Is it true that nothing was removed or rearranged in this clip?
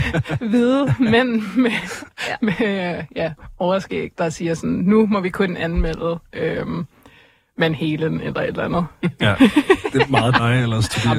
yes; 0 cuts

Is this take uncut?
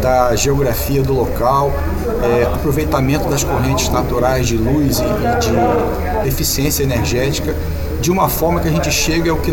no; 2 cuts; at 2.5 s, 6.2 s

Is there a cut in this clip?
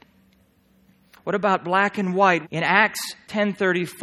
yes; 2 cuts; at 1.2 s, 2.4 s

